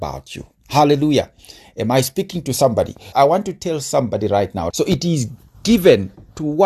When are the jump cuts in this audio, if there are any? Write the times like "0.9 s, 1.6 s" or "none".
3.1 s, 4.7 s